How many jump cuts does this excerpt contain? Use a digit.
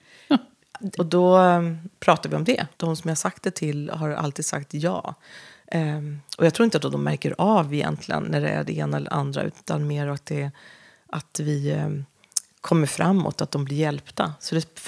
2